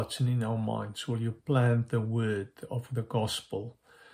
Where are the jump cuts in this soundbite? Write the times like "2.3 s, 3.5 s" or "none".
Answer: none